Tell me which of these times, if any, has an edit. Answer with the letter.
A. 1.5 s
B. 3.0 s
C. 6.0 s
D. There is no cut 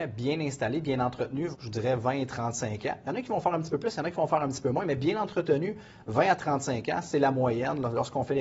A